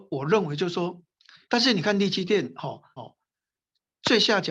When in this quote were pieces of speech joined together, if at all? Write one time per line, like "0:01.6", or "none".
0:01.4
0:03.0